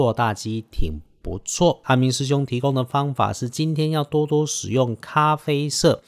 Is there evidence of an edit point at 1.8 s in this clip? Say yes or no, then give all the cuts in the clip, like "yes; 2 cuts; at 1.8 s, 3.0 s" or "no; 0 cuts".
yes; 1 cut; at 1.8 s